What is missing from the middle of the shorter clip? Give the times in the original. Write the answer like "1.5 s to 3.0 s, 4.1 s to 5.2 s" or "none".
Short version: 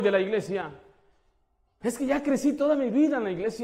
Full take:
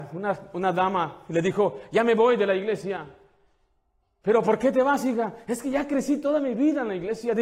4.2 s to 5.4 s